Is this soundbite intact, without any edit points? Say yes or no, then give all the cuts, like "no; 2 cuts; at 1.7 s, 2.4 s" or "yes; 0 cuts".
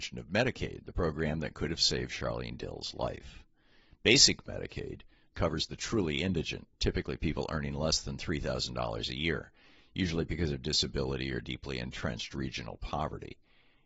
no; 1 cut; at 5.3 s